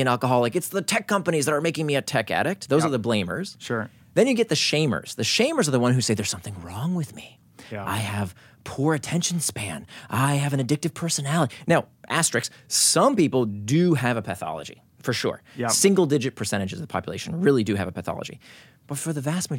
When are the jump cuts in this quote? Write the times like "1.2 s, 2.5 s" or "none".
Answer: none

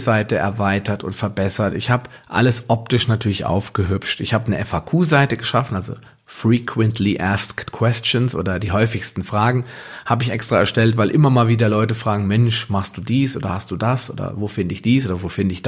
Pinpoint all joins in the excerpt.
none

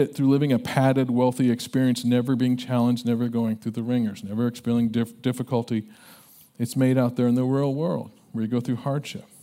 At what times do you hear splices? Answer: none

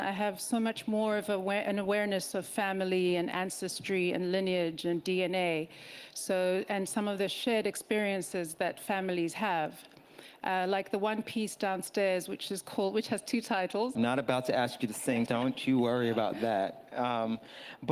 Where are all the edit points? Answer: 13.9 s, 15.3 s

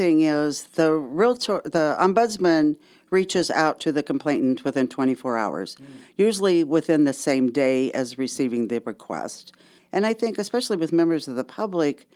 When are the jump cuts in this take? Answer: 9.8 s

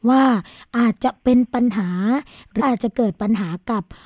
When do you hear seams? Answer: 2.6 s

